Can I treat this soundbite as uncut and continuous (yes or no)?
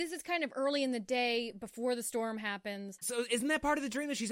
no